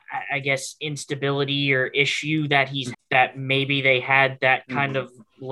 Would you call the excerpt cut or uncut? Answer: cut